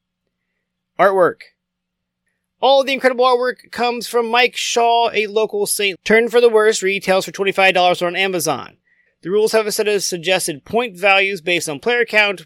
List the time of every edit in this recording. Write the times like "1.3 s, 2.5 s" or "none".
6.0 s, 9.1 s